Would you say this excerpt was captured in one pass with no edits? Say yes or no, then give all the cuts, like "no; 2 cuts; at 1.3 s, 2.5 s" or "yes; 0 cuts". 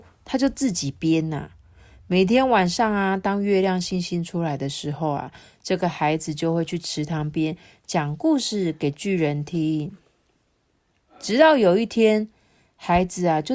yes; 0 cuts